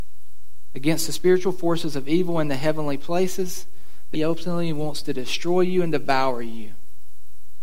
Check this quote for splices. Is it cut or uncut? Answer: cut